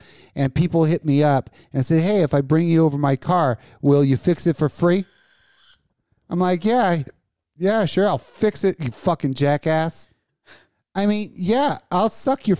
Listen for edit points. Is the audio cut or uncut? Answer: uncut